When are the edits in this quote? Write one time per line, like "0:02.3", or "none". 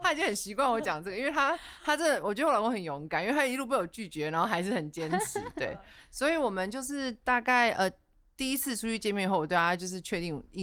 none